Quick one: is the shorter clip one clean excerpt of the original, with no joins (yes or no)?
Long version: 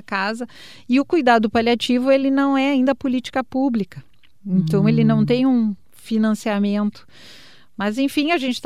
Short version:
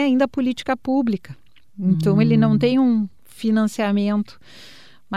yes